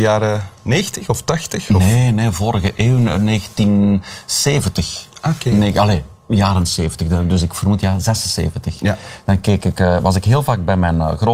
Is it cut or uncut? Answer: uncut